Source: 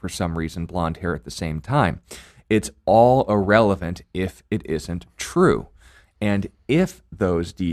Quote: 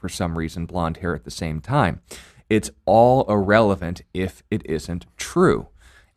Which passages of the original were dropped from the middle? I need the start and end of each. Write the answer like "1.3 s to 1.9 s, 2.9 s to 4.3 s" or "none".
none